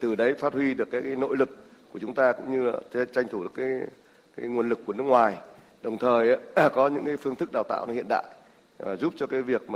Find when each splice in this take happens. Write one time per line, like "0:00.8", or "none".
none